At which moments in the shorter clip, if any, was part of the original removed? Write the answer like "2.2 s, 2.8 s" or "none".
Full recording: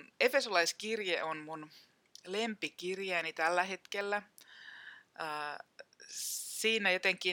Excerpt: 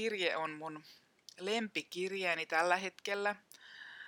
none